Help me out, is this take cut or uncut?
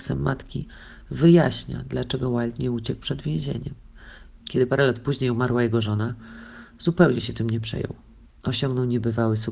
cut